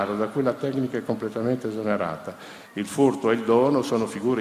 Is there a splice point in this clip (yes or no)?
yes